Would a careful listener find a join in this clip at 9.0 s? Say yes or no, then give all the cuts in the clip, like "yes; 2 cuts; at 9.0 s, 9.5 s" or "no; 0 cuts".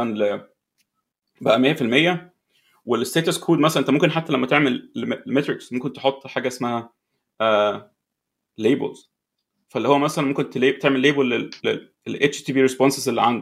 no; 0 cuts